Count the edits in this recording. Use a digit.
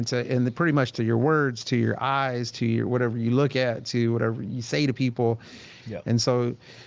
1